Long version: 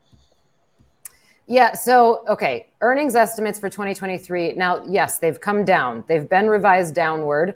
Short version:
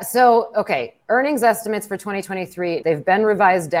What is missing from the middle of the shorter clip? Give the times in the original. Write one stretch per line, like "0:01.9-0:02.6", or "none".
0:04.5-0:06.1